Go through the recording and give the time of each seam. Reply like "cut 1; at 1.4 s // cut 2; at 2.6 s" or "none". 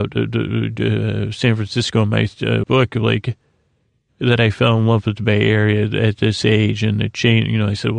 cut 1; at 2.6 s

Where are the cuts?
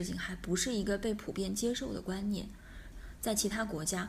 cut 1; at 2.9 s

